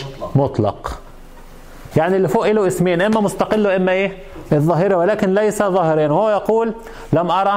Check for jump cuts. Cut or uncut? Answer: cut